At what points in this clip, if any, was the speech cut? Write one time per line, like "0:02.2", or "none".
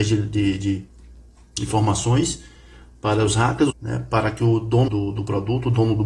0:03.7
0:04.9